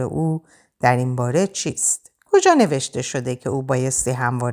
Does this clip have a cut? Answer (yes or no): yes